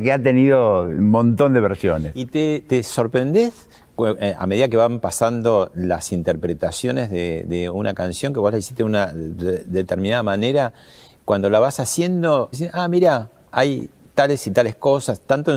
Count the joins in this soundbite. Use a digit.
1